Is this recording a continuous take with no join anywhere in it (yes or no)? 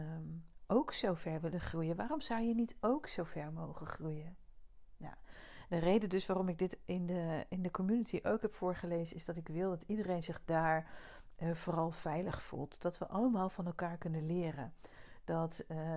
yes